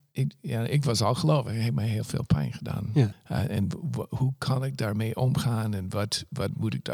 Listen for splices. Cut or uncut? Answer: cut